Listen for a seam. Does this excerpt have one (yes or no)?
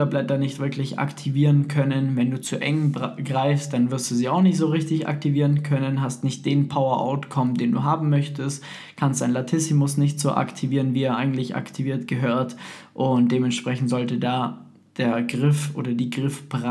no